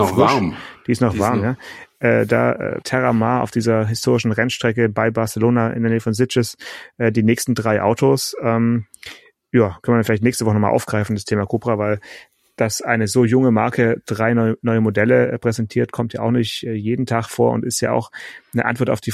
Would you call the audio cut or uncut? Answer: cut